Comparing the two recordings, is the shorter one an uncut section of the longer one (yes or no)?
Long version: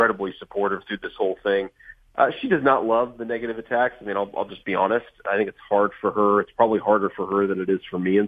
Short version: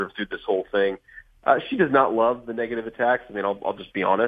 yes